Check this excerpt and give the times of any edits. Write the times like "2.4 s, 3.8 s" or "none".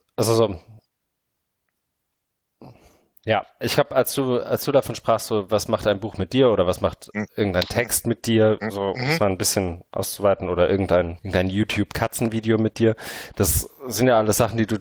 11.2 s